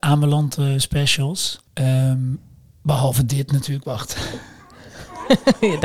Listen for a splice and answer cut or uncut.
cut